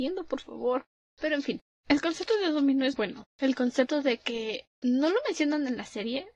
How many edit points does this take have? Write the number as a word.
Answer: one